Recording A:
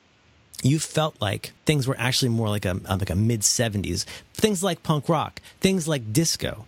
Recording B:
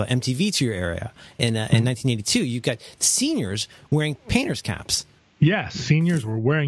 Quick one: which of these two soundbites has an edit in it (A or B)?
A